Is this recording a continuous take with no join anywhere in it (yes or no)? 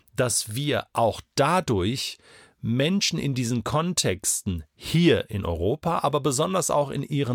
yes